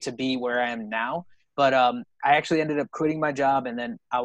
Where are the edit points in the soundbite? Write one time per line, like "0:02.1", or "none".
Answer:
none